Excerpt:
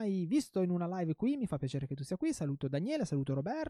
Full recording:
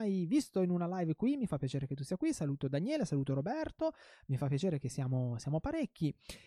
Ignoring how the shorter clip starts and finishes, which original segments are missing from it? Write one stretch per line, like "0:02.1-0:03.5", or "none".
none